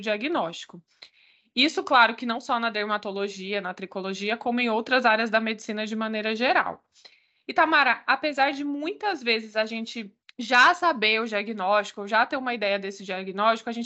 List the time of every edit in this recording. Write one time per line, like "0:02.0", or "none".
none